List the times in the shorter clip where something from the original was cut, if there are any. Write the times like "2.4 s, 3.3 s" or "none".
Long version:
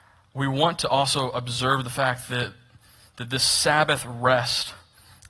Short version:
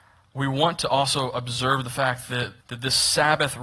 2.6 s